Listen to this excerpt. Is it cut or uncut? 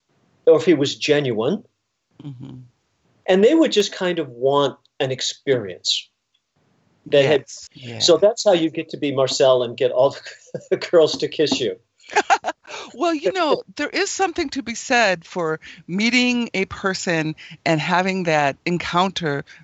cut